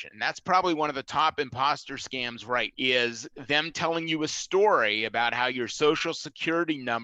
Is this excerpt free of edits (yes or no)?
no